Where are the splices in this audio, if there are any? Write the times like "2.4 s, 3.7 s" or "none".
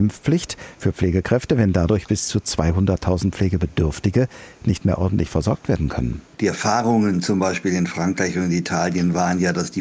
6.3 s